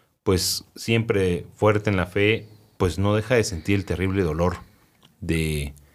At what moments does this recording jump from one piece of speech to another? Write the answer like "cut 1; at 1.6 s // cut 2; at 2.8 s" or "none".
none